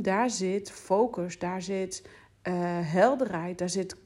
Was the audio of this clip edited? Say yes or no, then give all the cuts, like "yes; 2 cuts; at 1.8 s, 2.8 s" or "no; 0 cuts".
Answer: no; 0 cuts